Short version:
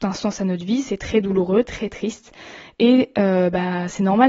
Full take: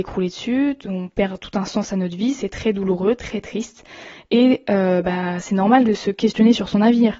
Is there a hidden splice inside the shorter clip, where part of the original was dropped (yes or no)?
no